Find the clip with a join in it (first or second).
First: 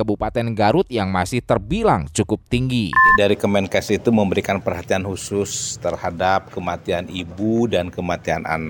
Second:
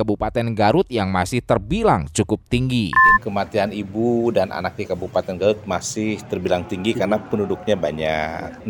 second